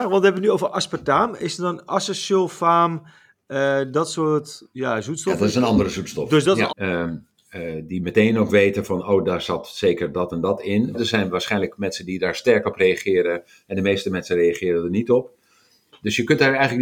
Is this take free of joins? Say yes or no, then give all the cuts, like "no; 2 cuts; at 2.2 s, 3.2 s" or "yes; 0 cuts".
no; 2 cuts; at 6.7 s, 10.9 s